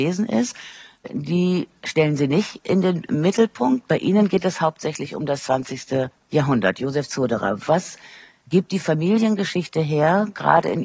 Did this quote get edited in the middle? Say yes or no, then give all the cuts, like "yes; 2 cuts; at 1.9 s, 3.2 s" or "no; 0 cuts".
no; 0 cuts